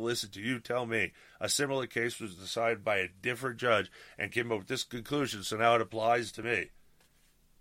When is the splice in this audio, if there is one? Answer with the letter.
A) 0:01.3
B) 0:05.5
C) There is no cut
C